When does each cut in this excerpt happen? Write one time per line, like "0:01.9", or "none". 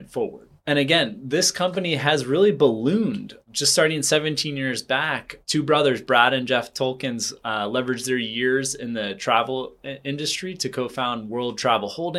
none